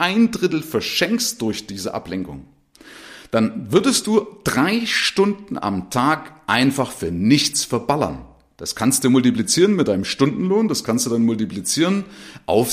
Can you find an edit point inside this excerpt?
no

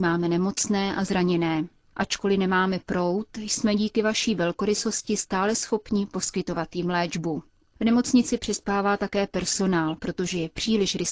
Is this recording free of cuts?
yes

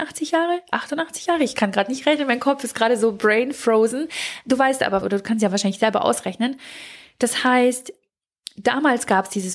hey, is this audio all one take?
no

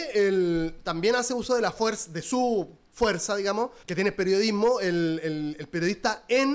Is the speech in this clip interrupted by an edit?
yes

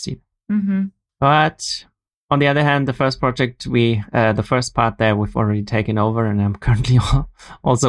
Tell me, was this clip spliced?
no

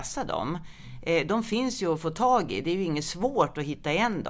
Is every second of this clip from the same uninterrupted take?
yes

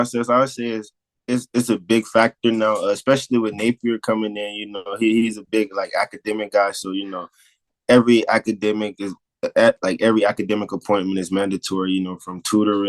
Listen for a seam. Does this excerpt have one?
no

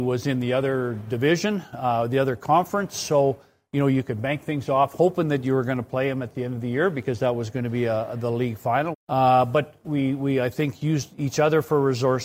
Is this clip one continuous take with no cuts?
no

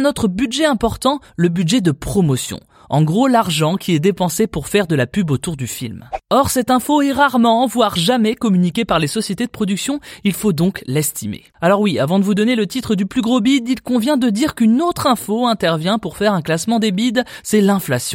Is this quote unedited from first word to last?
yes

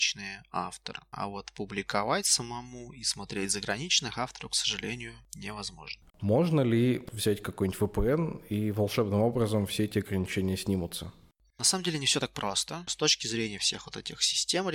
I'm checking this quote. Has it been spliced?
yes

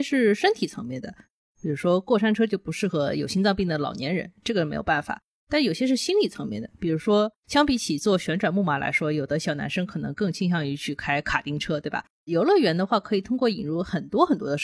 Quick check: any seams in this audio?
no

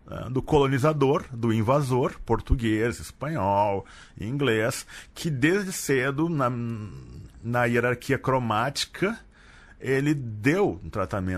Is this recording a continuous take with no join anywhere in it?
yes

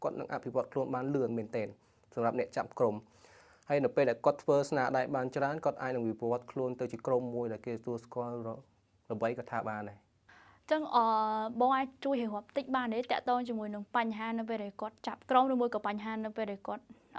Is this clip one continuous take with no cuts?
yes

